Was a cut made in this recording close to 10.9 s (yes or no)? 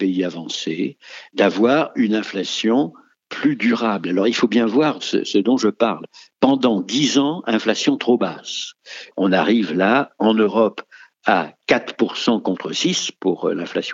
no